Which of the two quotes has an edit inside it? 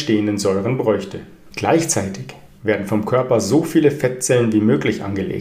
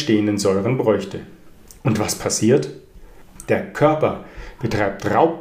first; 1 cut; at 1.5 s

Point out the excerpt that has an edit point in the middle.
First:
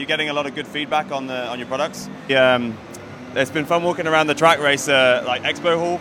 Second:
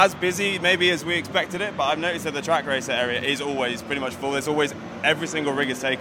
first; 1 cut; at 2.3 s

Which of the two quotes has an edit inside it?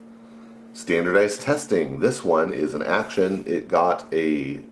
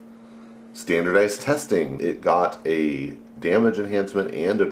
second; 1 cut; at 2.0 s

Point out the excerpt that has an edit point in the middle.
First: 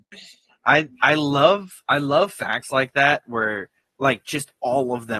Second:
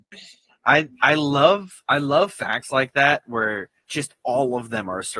second; 1 cut; at 3.9 s

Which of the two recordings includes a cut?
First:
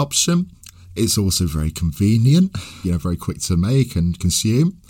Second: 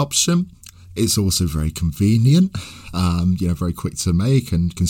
first; 1 cut; at 2.8 s

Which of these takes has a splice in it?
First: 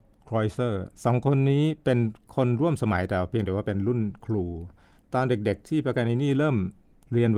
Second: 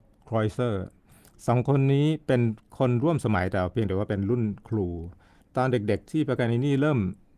first; 1 cut; at 0.9 s

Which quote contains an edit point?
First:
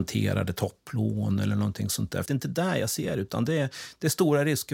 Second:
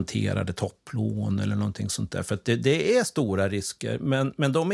first; 1 cut; at 2.3 s

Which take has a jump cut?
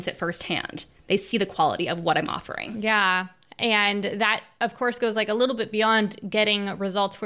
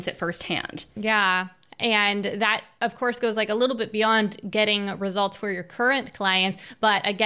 second; 1 cut; at 1.0 s

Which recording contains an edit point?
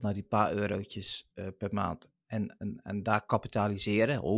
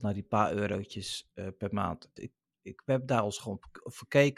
second; 1 cut; at 2.2 s

